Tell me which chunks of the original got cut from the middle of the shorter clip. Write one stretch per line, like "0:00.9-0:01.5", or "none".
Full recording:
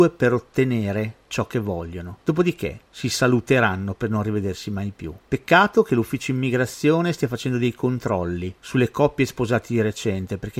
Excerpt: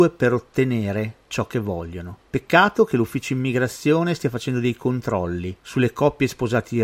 0:02.2-0:05.2